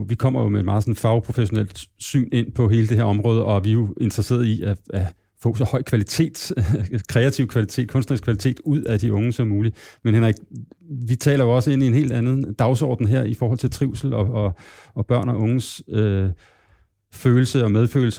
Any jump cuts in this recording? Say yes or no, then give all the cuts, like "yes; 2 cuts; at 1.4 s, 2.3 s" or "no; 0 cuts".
no; 0 cuts